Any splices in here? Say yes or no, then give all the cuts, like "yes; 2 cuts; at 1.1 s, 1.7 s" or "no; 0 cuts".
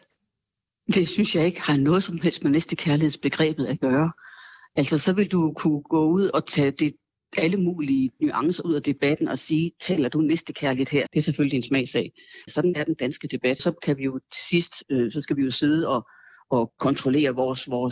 yes; 3 cuts; at 11.1 s, 12.5 s, 13.6 s